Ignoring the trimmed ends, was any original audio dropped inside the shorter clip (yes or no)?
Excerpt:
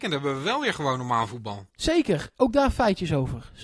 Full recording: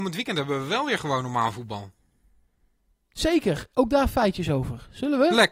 yes